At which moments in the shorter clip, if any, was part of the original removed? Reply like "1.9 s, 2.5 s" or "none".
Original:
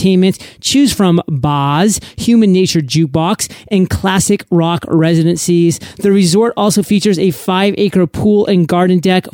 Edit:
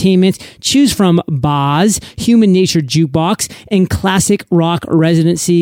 none